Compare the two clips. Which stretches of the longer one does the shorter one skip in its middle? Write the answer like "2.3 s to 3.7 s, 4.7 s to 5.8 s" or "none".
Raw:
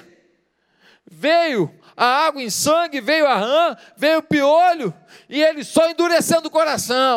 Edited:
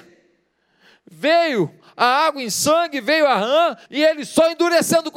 3.8 s to 5.2 s